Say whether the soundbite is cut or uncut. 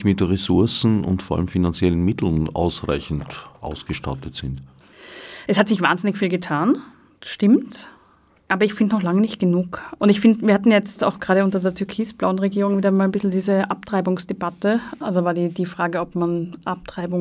uncut